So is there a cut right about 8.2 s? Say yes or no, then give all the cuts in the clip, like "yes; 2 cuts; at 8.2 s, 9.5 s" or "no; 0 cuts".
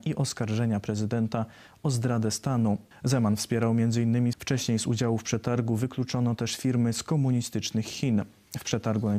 no; 2 cuts; at 2.9 s, 4.3 s